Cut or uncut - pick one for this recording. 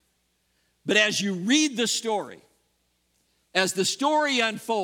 uncut